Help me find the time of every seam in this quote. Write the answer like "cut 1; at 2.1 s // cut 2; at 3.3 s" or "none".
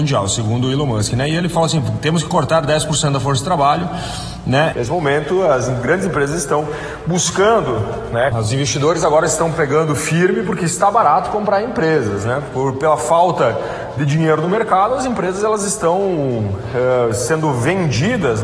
cut 1; at 4.7 s // cut 2; at 8.3 s